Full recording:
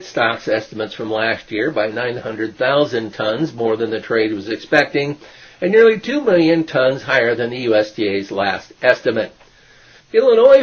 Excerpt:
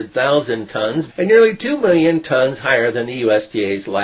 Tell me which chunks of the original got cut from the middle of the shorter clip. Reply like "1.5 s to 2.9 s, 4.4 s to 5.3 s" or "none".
3.5 s to 5.5 s